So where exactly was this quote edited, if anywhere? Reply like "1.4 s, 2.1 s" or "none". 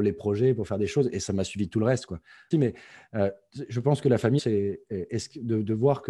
2.5 s, 4.4 s